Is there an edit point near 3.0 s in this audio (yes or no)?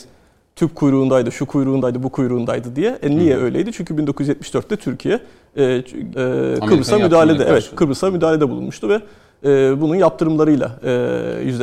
no